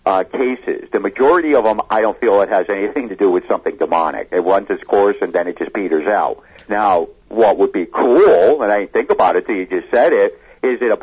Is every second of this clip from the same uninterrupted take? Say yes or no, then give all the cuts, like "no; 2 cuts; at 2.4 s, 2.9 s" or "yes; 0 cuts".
no; 1 cut; at 6.7 s